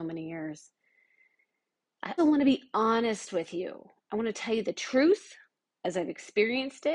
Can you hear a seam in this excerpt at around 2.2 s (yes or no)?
yes